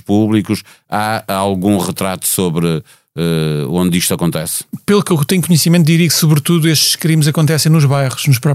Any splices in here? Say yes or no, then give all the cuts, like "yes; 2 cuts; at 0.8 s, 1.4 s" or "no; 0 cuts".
no; 0 cuts